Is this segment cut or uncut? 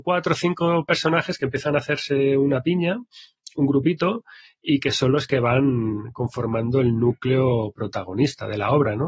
uncut